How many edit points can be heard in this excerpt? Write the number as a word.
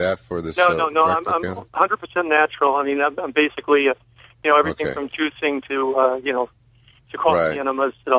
zero